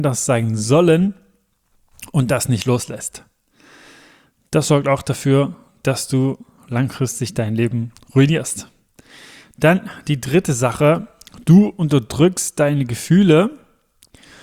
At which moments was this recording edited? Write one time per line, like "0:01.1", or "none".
none